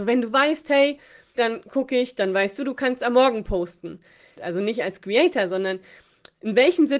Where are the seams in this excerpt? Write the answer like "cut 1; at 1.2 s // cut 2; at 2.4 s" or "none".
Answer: cut 1; at 1.3 s // cut 2; at 4.4 s